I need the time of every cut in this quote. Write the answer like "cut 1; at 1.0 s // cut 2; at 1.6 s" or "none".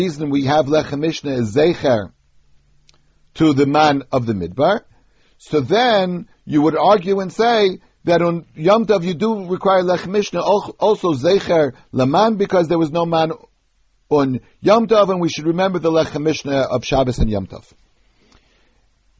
none

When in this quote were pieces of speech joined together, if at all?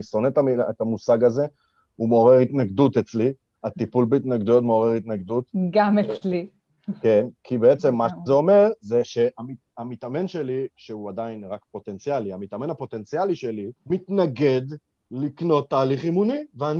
cut 1; at 7.4 s // cut 2; at 13.8 s

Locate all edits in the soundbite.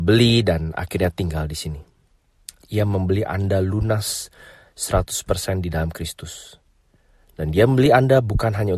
cut 1; at 2.6 s

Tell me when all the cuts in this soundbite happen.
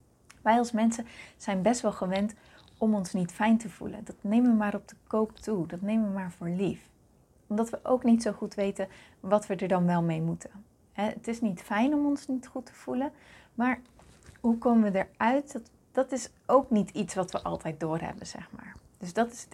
none

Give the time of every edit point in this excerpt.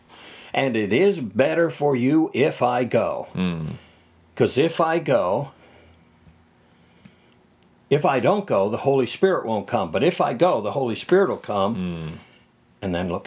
none

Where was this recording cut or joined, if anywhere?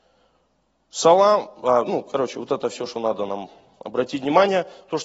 none

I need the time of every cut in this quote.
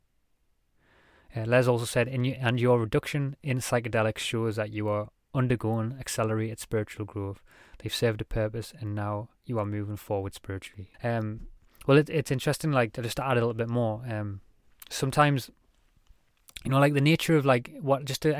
cut 1; at 10.9 s

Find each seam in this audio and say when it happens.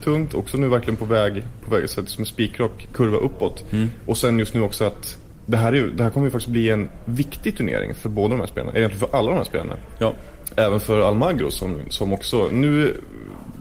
none

